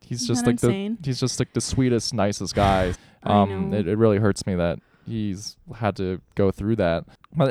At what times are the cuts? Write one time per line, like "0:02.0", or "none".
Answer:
0:02.9